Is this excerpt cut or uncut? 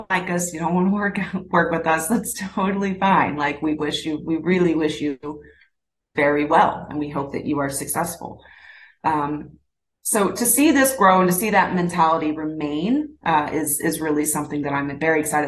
uncut